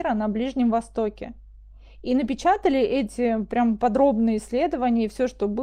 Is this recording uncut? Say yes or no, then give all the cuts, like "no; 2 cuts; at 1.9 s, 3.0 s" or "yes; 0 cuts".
yes; 0 cuts